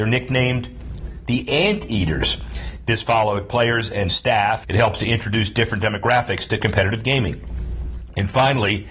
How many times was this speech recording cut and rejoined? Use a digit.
1